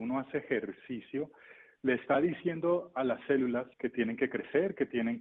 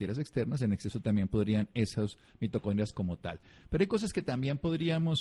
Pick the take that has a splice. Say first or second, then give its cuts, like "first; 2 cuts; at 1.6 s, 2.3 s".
first; 1 cut; at 3.7 s